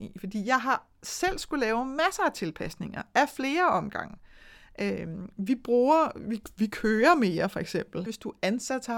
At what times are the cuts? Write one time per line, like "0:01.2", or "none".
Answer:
0:08.1